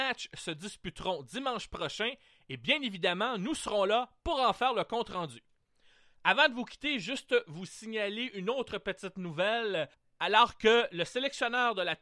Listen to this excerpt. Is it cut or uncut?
uncut